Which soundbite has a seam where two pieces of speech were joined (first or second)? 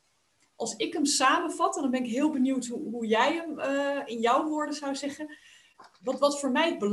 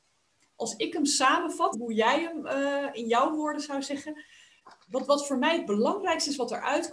second